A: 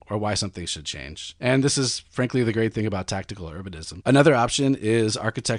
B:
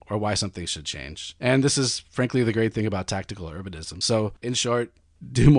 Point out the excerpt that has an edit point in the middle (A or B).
A